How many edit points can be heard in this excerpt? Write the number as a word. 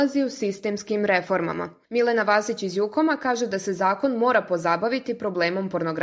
zero